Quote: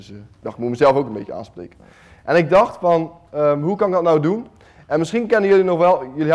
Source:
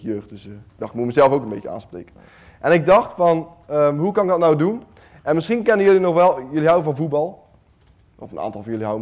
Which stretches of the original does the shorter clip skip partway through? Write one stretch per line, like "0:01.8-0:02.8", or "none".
none

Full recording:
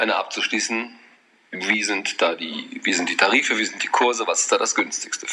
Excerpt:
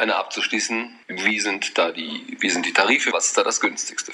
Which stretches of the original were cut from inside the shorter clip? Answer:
0:01.0-0:01.5
0:03.5-0:04.3

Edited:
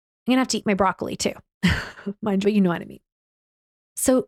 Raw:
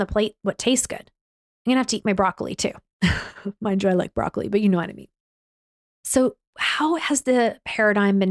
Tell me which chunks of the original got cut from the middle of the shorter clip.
0:03.8-0:04.5

